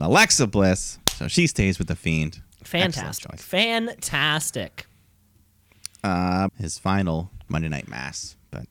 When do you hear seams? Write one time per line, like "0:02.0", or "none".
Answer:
0:06.5